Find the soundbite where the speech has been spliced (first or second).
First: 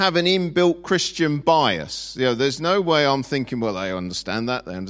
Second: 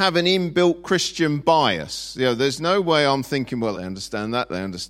second